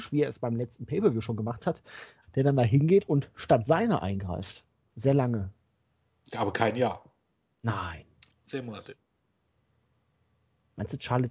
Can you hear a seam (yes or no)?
yes